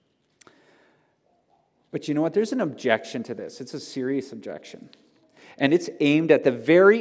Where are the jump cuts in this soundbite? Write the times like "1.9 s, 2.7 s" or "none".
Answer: none